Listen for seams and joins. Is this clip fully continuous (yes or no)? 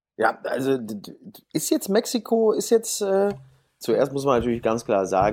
no